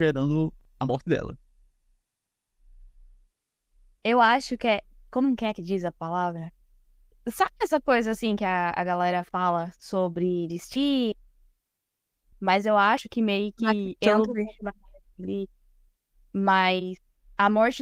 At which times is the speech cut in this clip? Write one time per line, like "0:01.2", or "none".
0:12.3